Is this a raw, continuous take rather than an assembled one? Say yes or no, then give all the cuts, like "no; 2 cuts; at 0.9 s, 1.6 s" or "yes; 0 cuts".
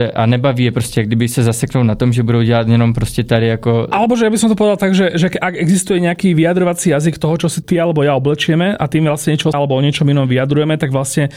no; 1 cut; at 9.5 s